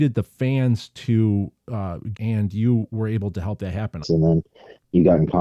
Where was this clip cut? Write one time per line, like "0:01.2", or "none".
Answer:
0:02.2
0:04.0